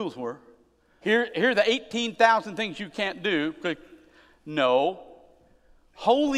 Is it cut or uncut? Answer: cut